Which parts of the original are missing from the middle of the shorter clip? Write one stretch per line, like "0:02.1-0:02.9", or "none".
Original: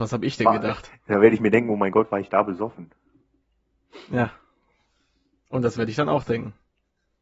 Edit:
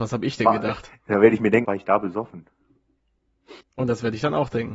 0:01.6-0:02.1
0:04.1-0:05.4